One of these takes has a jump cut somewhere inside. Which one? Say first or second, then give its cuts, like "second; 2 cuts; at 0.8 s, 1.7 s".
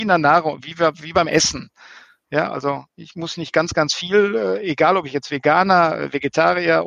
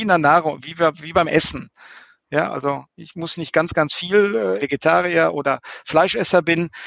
second; 1 cut; at 4.6 s